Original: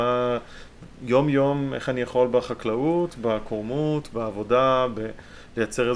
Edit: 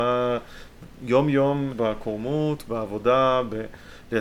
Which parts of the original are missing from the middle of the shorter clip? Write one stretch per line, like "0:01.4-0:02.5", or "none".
0:01.7-0:03.1